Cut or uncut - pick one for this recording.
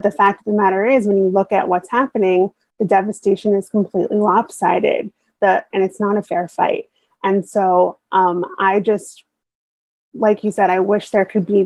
cut